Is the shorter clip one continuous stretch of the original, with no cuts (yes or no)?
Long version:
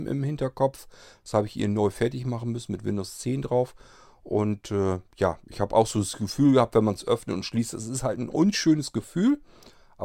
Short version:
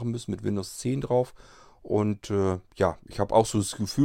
yes